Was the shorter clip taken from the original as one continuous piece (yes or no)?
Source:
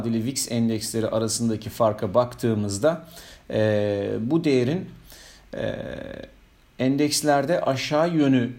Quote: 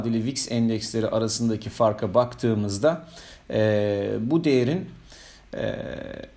yes